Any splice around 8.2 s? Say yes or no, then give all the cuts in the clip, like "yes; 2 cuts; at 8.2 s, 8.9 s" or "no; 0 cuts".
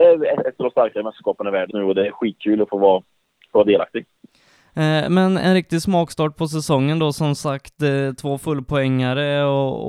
no; 1 cut; at 1.7 s